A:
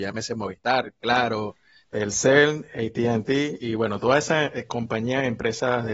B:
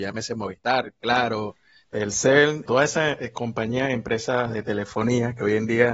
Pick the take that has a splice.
B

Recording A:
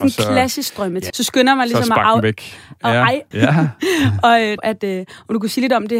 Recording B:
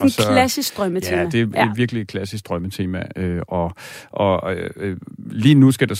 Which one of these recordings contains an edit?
A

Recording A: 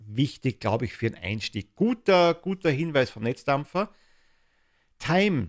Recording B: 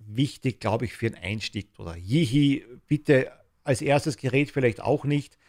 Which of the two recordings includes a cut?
B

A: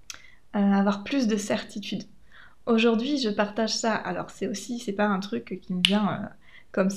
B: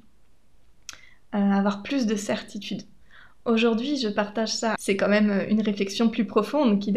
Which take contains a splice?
B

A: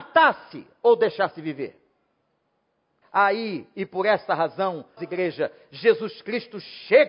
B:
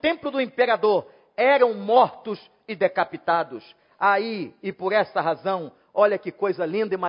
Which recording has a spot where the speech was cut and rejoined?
A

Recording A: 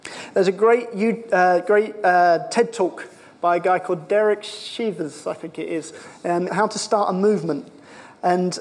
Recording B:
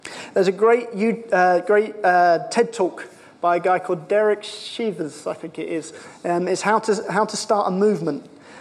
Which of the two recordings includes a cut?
A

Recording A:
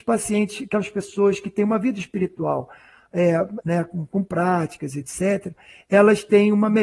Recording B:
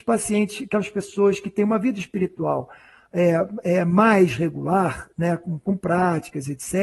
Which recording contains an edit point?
A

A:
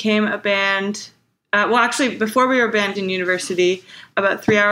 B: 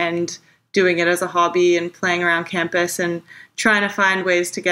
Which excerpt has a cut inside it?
A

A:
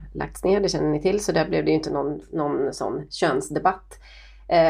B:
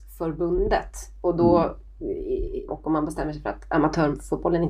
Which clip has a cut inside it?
B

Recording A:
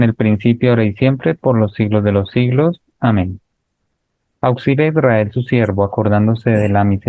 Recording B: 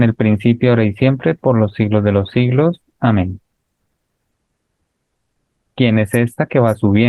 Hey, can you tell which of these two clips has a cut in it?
A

